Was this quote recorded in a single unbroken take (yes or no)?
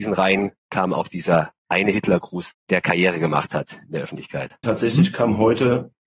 no